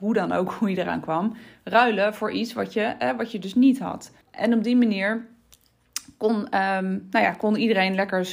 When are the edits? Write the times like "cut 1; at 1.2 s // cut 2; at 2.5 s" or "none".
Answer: cut 1; at 4.2 s